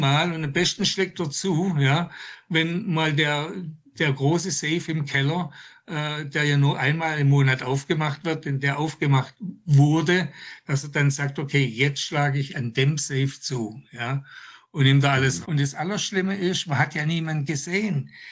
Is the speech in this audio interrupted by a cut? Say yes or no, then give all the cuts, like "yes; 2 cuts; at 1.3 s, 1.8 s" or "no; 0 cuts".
yes; 1 cut; at 15.4 s